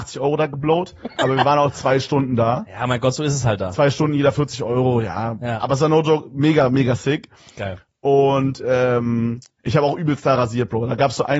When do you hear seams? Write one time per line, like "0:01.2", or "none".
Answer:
none